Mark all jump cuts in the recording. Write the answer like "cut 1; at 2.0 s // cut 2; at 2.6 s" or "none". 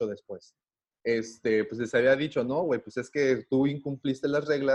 cut 1; at 0.9 s